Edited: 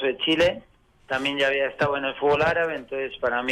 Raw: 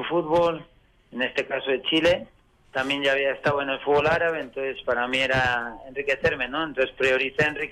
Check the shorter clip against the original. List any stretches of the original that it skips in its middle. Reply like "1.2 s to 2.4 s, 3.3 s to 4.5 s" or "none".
none